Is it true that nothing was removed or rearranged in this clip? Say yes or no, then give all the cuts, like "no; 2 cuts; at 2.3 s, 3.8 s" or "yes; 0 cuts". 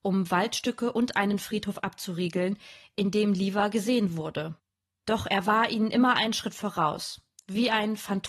yes; 0 cuts